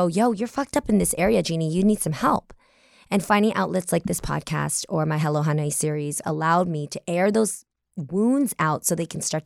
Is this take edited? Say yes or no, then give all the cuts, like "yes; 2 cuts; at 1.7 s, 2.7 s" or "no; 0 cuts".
yes; 1 cut; at 6.2 s